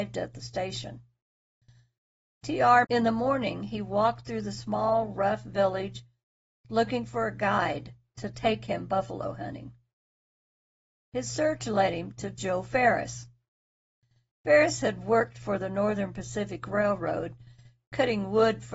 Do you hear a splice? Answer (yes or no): yes